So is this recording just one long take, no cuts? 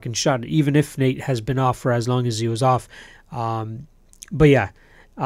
yes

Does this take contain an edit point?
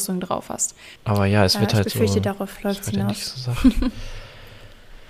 yes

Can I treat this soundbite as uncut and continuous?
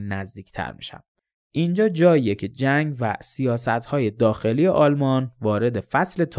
yes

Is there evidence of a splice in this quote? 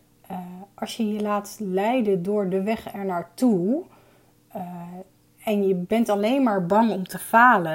no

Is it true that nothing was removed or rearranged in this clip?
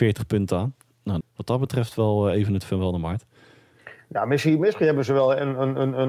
no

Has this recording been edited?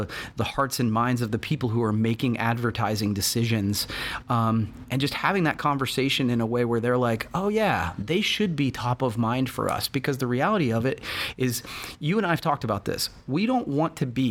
no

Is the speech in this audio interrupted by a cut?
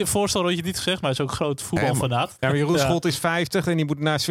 yes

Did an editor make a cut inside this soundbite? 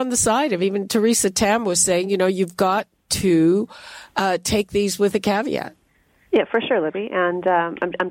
no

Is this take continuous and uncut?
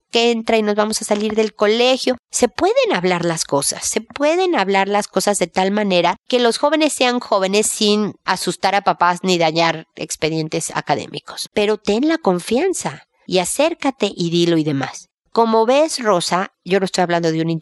no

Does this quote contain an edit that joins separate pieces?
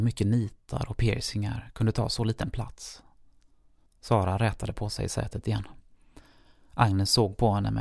yes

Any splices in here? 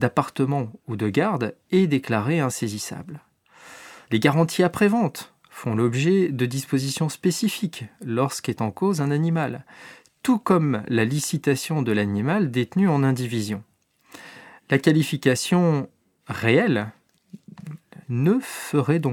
yes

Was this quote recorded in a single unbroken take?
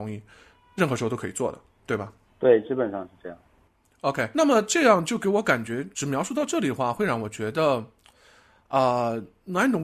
no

